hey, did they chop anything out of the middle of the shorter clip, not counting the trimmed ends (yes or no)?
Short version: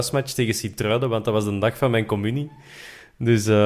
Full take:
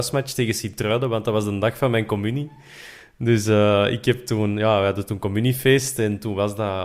no